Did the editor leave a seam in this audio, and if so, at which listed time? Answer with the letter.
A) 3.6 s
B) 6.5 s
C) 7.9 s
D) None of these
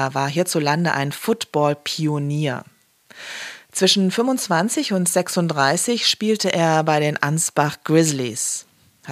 D